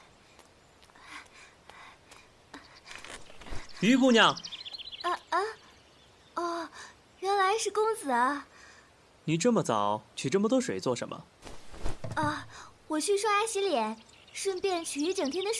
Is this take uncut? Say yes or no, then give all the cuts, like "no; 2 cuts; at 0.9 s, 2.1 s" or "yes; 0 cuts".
no; 1 cut; at 5.2 s